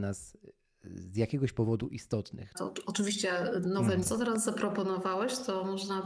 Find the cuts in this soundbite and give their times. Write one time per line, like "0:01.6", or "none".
0:02.5
0:04.0